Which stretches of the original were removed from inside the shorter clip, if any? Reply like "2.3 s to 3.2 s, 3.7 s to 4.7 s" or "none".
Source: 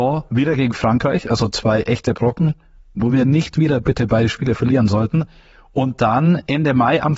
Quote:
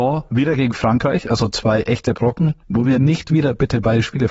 2.6 s to 2.9 s